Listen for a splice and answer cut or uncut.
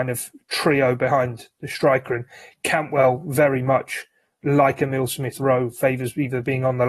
uncut